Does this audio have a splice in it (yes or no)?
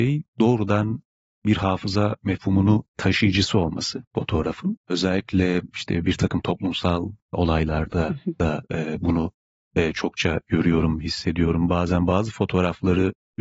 no